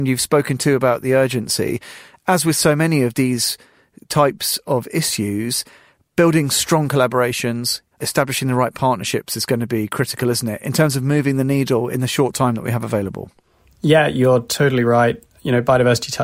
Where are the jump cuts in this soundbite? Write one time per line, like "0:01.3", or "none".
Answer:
0:07.9